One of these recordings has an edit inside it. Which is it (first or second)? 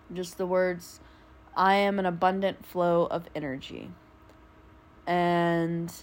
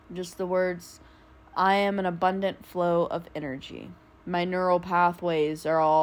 second